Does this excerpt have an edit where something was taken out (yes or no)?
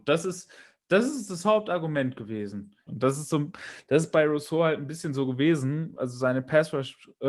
yes